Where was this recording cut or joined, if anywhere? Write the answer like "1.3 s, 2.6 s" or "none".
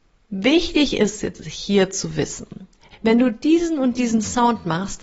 2.9 s

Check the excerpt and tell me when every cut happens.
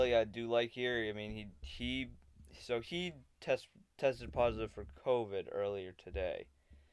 5.0 s

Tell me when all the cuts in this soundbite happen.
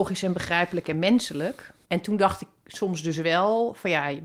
1.8 s

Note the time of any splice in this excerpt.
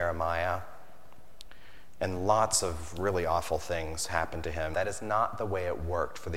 4.7 s

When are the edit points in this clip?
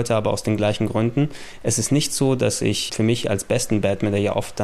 2.9 s

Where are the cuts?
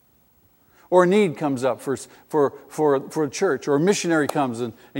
none

